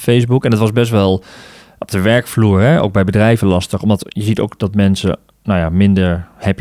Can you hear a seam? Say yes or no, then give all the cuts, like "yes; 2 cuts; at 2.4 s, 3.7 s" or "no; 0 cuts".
no; 0 cuts